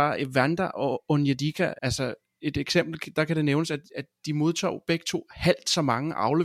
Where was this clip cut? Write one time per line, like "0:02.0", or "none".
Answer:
0:01.8